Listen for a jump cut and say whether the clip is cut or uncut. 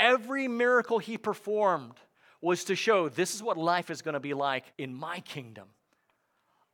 cut